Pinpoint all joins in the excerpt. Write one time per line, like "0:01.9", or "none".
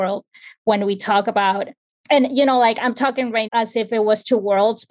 0:03.5